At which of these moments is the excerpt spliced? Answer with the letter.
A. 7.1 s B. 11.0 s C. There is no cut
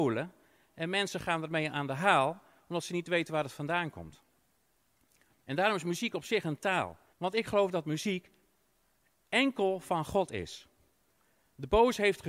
A